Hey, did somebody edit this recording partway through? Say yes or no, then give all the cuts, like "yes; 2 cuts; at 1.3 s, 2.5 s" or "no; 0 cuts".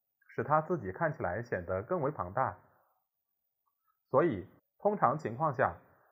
yes; 1 cut; at 4.6 s